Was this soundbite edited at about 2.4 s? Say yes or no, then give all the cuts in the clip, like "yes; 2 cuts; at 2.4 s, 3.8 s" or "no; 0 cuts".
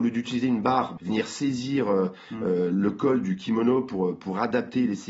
no; 1 cut; at 1.0 s